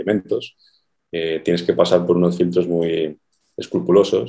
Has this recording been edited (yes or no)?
no